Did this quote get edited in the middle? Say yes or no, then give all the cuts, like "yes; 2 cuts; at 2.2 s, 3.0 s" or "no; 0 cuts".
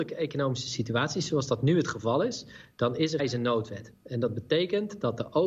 yes; 1 cut; at 3.2 s